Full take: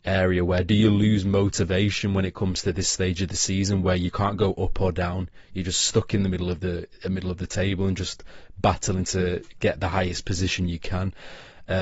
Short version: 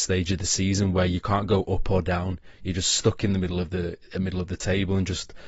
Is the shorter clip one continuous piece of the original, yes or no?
yes